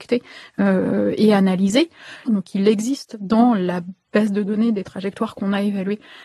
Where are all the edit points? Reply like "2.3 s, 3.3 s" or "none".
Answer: 2.2 s